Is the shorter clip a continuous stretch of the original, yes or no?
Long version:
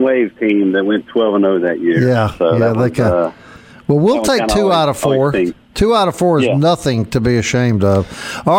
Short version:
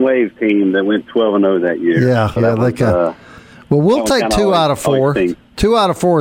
no